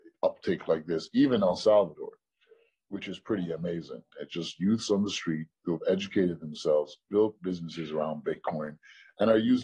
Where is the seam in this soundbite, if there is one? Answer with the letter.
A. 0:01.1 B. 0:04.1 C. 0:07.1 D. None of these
B